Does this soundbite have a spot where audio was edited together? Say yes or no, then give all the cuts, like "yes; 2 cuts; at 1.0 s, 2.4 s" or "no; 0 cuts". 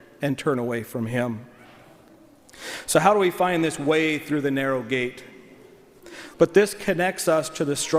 yes; 1 cut; at 6.3 s